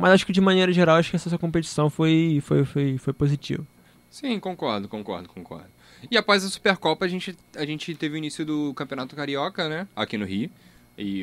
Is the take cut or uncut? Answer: uncut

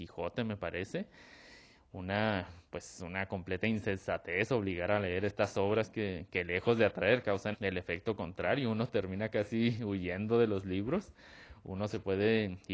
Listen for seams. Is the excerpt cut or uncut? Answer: cut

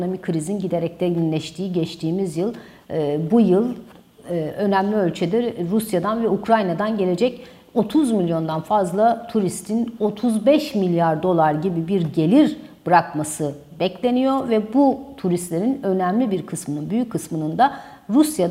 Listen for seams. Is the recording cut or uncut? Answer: uncut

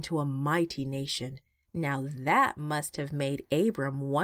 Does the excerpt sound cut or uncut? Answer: cut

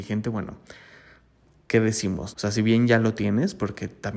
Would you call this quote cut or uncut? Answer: cut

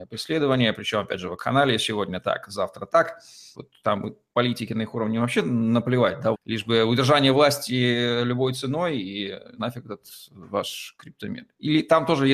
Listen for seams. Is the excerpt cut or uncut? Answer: cut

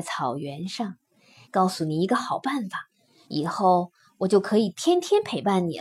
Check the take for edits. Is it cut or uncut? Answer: cut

